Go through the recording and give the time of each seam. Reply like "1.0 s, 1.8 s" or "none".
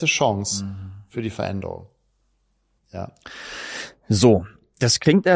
2.8 s